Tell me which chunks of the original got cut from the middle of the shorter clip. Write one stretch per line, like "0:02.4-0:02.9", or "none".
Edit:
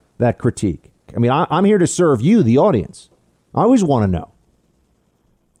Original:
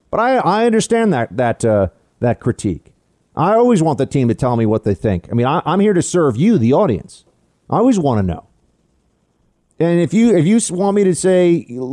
0:03.1-0:05.2